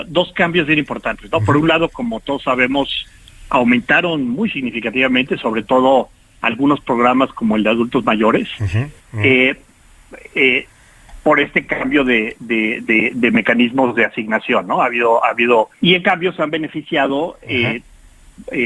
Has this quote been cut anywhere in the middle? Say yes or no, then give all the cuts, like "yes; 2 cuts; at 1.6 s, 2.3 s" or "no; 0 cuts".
yes; 2 cuts; at 9.0 s, 15.7 s